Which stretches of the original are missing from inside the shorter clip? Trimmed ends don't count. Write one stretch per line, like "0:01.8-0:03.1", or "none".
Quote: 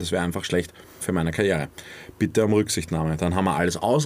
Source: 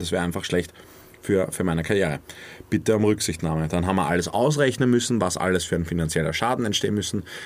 0:01.0-0:01.5